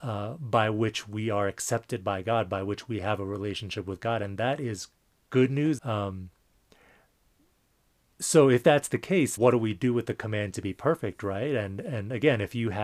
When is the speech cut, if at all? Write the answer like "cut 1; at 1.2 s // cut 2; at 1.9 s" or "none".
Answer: cut 1; at 5.8 s // cut 2; at 9.4 s